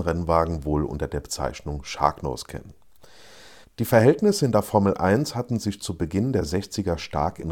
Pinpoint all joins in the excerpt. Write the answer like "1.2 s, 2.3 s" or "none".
3.6 s